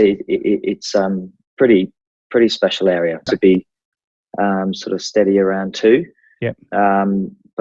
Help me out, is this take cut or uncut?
cut